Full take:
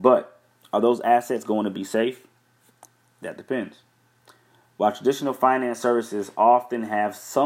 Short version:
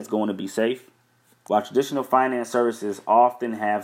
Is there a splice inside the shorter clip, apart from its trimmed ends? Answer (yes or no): yes